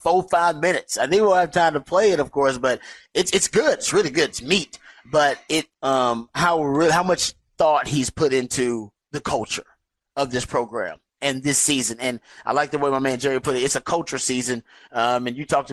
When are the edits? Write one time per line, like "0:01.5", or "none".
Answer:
0:05.7